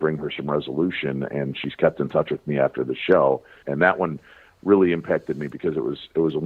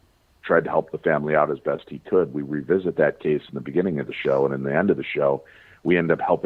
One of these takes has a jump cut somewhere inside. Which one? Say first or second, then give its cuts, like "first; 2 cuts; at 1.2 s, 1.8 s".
first; 1 cut; at 3.6 s